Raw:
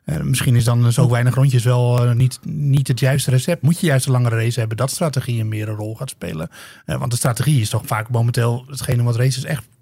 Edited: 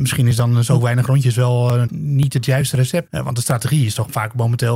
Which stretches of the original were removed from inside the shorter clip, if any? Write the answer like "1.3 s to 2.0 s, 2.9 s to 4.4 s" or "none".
2.1 s to 2.4 s, 3.6 s to 6.8 s